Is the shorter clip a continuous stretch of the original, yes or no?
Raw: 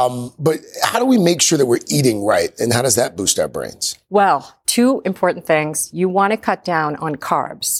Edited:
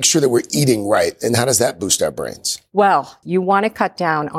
no